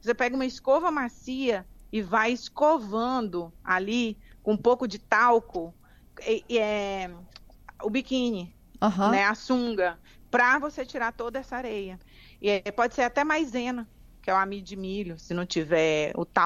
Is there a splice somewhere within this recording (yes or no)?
no